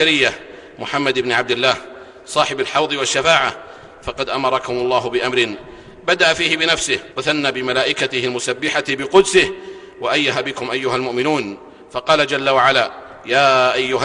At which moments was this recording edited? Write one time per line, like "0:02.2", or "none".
0:07.1